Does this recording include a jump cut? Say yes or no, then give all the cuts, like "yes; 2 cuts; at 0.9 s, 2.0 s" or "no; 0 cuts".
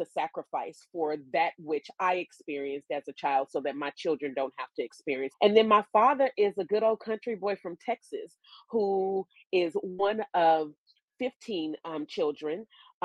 yes; 1 cut; at 5.3 s